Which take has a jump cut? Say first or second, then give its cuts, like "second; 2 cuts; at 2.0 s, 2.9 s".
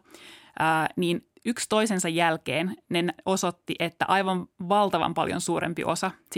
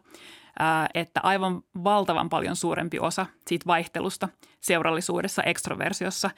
second; 2 cuts; at 0.9 s, 5.4 s